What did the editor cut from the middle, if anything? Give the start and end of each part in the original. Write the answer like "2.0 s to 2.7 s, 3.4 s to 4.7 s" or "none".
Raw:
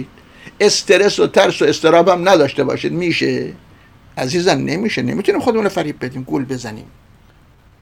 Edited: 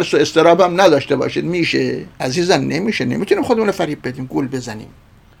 3.6 s to 4.1 s

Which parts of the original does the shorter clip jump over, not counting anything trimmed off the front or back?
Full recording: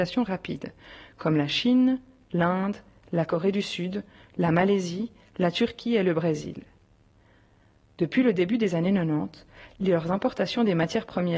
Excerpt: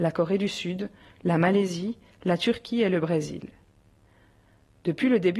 none

